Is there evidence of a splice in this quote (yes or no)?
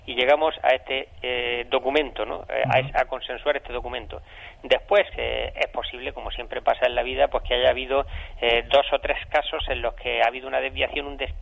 yes